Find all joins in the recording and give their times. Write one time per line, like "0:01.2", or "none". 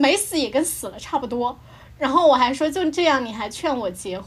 none